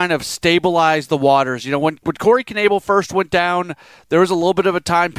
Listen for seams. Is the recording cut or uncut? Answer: uncut